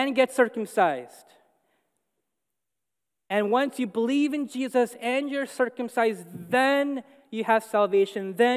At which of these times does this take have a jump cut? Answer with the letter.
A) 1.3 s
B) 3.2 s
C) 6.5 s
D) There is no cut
D